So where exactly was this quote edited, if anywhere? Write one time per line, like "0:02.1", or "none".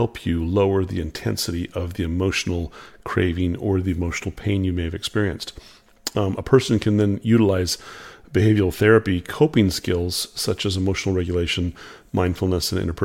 none